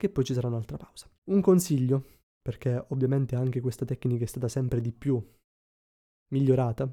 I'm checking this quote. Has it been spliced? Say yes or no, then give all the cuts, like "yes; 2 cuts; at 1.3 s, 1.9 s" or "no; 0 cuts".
yes; 1 cut; at 1.2 s